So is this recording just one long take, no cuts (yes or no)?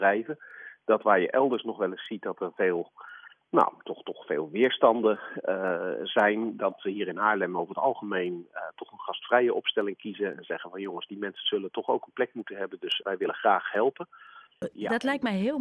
no